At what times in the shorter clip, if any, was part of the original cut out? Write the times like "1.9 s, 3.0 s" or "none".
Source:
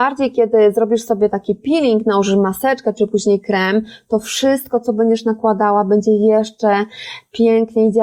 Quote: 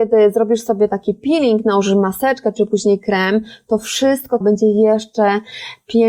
4.4 s